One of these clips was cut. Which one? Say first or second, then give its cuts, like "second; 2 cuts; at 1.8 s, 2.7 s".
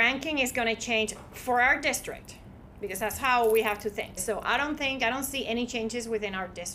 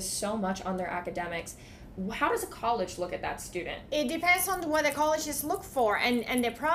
first; 1 cut; at 4.2 s